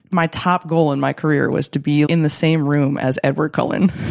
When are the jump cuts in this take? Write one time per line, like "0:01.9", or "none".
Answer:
0:02.1